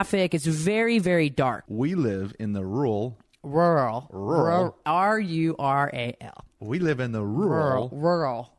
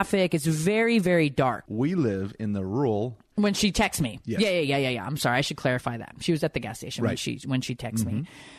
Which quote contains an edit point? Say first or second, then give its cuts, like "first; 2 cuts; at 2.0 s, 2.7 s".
second; 1 cut; at 3.3 s